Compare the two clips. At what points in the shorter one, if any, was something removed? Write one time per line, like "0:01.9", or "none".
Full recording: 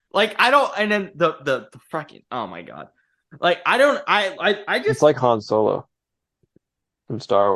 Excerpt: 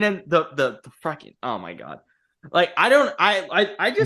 none